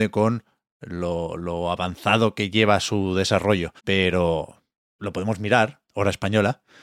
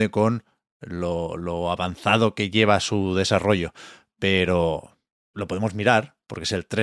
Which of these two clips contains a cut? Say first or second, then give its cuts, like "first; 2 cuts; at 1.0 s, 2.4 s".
first; 2 cuts; at 3.8 s, 5.9 s